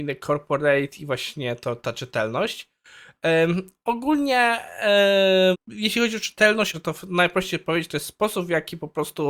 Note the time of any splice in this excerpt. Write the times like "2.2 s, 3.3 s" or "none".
5.5 s, 6.7 s